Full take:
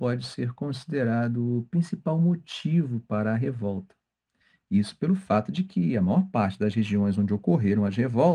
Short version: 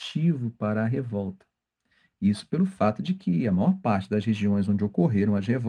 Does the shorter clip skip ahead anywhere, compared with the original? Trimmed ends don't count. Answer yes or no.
no